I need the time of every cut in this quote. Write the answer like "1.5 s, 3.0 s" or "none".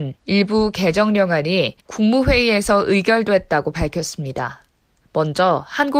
1.8 s